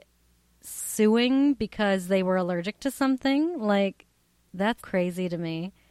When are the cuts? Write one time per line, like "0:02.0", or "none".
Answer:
0:04.8